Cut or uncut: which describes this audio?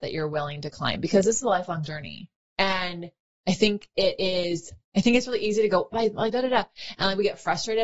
cut